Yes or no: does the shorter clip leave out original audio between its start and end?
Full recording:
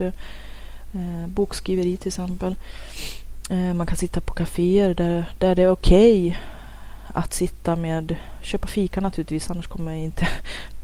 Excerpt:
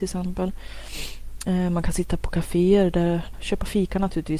yes